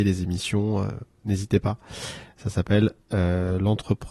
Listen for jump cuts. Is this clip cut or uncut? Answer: uncut